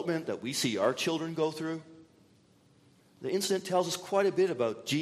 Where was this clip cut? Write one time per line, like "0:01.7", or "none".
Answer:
0:03.0